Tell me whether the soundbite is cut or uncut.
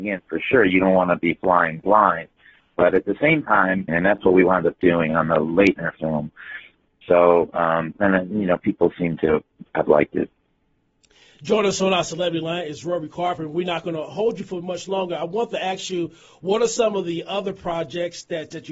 cut